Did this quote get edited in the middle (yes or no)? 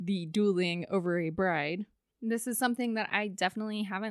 no